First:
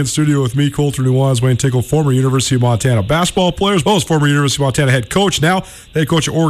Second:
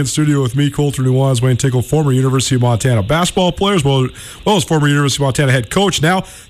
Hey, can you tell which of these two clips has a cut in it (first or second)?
first